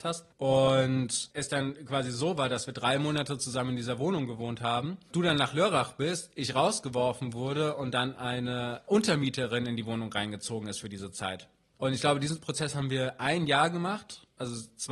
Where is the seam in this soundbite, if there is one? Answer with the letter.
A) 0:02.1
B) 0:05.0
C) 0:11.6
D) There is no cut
D